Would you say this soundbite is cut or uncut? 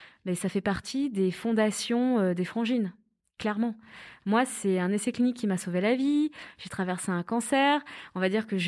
uncut